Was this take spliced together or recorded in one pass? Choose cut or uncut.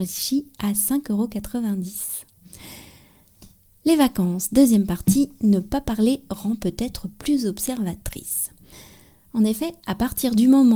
uncut